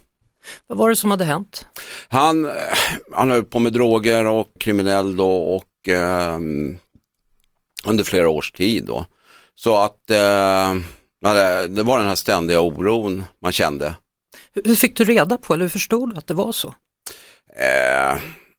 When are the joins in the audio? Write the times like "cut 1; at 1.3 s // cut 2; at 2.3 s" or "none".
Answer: cut 1; at 4.6 s